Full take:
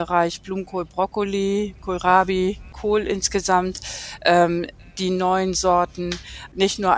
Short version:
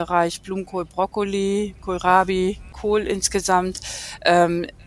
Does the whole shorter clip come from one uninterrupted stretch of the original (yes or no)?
yes